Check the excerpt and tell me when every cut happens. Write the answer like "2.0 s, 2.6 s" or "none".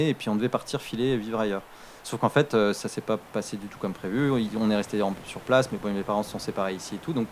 none